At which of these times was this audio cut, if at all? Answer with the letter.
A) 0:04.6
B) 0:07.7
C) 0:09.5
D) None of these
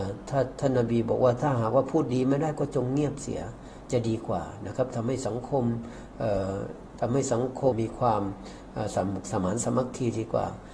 B